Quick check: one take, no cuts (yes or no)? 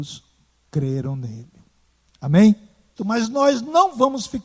no